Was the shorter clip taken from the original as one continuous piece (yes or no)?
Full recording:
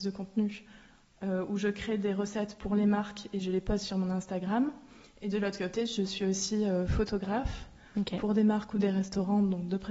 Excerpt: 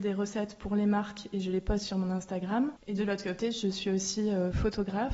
no